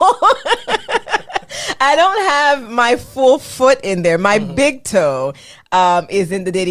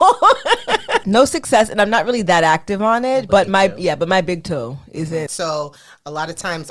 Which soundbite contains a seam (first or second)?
second